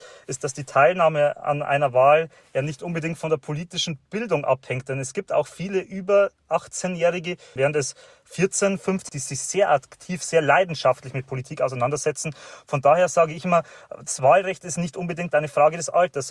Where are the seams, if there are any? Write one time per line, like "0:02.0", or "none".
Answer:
0:07.6
0:09.1